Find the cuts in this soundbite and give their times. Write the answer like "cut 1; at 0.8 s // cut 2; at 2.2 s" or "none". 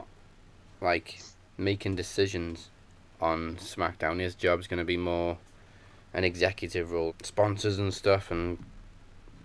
cut 1; at 7.1 s